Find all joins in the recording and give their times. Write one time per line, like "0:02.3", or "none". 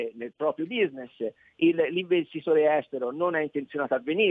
none